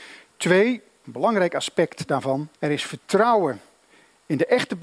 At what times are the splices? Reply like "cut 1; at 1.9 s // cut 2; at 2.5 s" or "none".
cut 1; at 1.0 s // cut 2; at 2.5 s